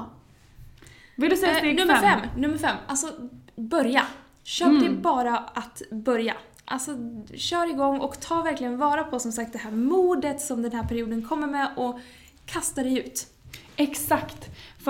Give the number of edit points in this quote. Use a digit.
0